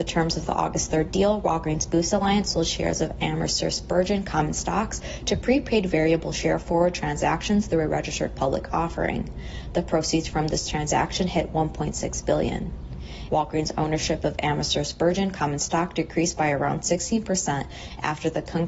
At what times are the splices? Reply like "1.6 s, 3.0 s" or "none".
13.3 s

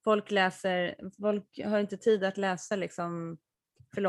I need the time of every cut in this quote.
none

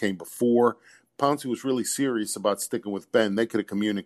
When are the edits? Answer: 1.1 s

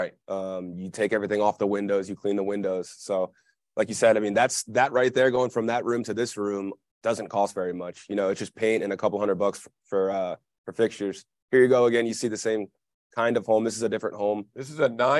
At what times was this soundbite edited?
none

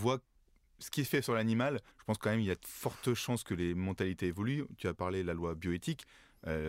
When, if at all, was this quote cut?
1.9 s

